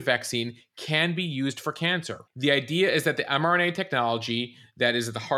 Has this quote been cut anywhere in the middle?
no; 0 cuts

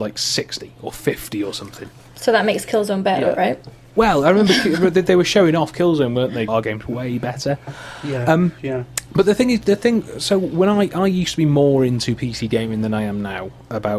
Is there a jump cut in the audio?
yes; 1 cut; at 6.5 s

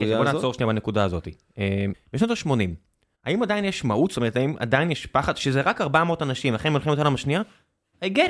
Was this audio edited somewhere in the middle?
yes; 1 cut; at 1.9 s

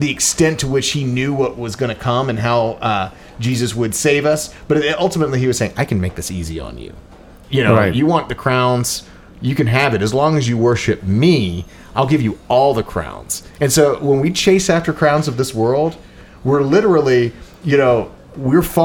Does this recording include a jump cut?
no; 0 cuts

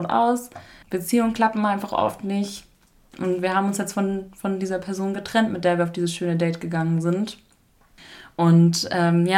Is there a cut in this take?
no; 0 cuts

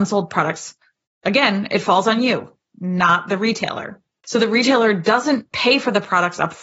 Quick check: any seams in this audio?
yes; 1 cut; at 4.2 s

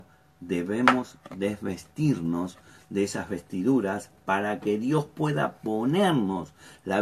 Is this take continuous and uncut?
yes; 0 cuts

